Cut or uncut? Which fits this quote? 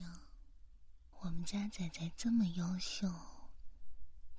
cut